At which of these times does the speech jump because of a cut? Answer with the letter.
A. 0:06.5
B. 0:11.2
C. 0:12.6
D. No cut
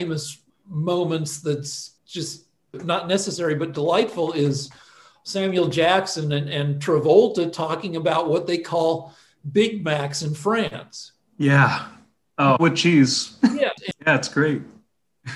C